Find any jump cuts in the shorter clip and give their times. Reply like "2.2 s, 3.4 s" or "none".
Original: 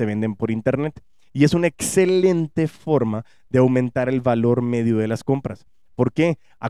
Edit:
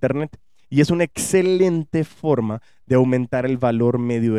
none